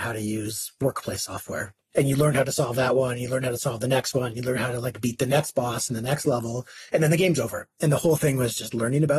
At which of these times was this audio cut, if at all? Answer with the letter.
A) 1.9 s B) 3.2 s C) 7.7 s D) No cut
A